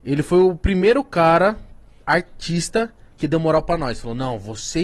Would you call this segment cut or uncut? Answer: uncut